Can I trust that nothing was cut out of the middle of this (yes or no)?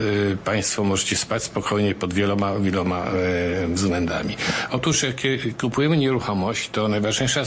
yes